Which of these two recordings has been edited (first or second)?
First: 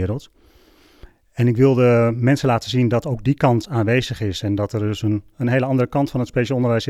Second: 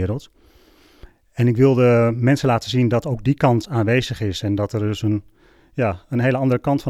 first